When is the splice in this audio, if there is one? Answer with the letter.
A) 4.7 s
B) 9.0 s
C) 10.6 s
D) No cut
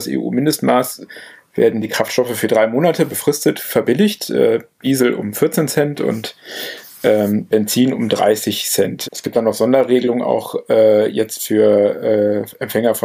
B